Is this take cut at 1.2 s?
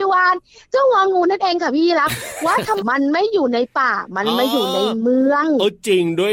no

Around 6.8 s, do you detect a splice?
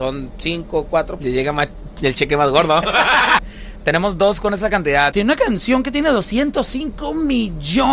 no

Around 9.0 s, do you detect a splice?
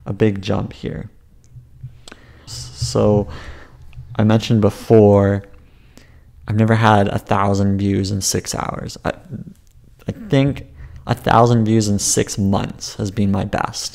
no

